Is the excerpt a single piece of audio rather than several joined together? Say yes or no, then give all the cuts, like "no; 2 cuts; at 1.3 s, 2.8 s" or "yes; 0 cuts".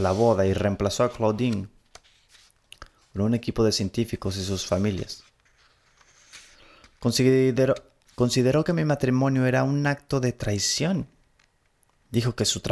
yes; 0 cuts